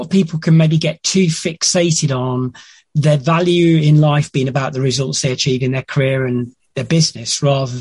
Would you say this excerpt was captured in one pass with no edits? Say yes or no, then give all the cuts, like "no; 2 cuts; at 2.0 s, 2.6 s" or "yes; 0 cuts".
yes; 0 cuts